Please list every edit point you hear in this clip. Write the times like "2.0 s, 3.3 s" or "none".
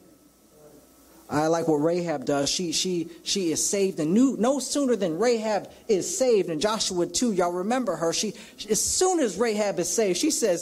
none